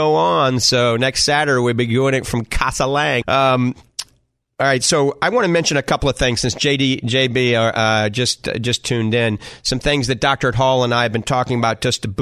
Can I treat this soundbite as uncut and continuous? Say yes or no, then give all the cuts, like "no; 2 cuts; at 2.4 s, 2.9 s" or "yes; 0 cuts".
no; 1 cut; at 3.2 s